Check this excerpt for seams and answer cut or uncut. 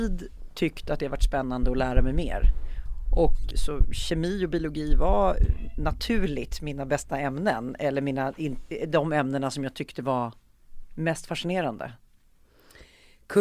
cut